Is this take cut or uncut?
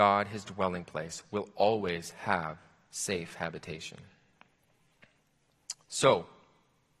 uncut